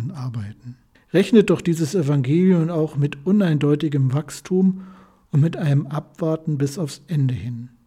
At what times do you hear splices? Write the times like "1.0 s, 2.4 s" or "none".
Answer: 0.9 s

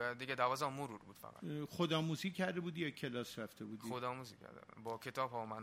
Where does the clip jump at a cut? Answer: none

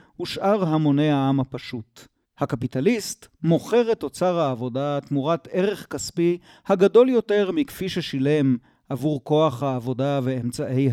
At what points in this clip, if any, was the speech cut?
2.2 s

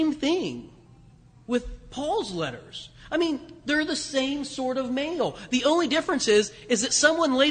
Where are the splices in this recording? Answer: none

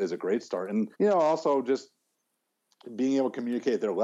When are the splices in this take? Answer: 0.9 s

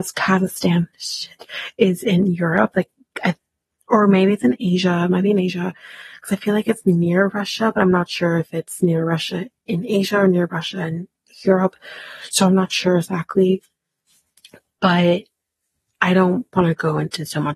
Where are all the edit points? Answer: none

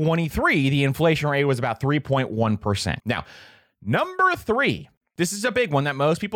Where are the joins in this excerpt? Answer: 3.0 s

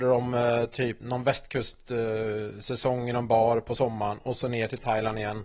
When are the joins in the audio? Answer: 1.0 s

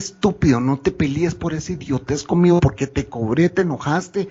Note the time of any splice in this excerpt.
none

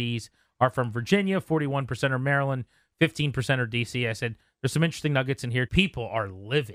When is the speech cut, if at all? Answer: 5.7 s

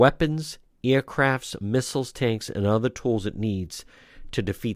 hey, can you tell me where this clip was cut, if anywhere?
none

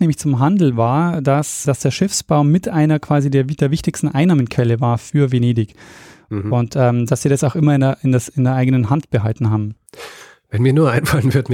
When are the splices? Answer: 1.6 s

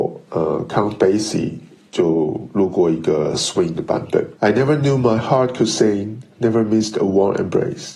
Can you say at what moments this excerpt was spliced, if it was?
4.4 s, 6.3 s

